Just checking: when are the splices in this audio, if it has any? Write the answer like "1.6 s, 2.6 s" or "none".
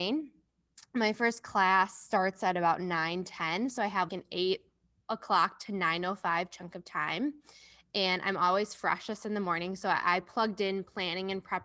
4.1 s